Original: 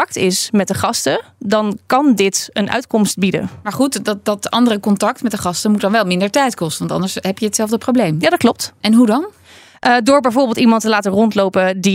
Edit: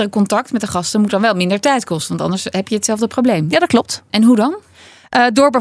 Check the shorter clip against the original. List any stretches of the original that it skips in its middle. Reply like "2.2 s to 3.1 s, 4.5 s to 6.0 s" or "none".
none